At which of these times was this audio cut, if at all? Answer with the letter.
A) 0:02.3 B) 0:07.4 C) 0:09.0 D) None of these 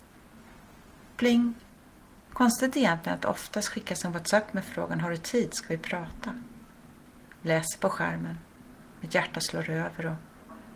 A